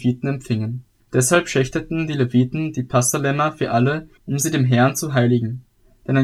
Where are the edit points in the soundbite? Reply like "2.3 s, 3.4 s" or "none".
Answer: 1.0 s, 4.2 s